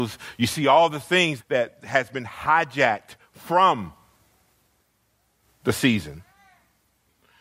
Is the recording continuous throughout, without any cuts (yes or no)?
no